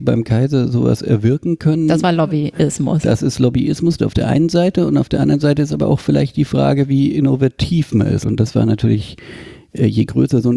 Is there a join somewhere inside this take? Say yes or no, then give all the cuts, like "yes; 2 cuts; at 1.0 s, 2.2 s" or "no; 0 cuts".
yes; 1 cut; at 8.2 s